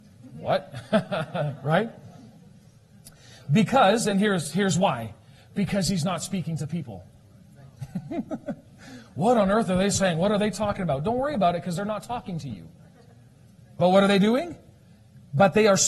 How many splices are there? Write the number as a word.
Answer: zero